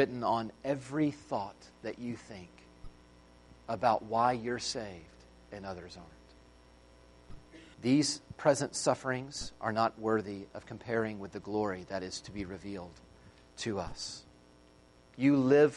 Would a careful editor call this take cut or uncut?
cut